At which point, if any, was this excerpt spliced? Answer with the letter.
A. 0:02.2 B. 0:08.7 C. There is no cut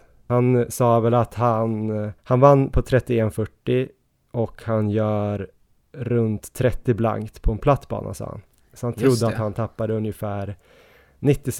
A